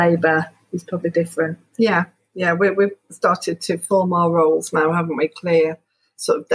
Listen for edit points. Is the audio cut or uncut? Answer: cut